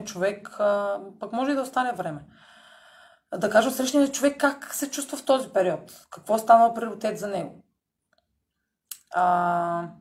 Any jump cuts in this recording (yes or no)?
no